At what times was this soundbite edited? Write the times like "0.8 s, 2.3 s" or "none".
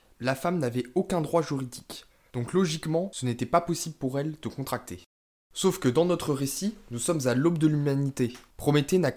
none